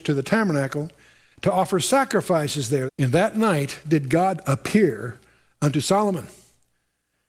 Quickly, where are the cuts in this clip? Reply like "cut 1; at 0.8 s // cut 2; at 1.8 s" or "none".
cut 1; at 2.9 s